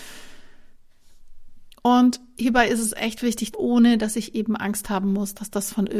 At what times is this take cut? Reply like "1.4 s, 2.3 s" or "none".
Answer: 1.7 s, 3.5 s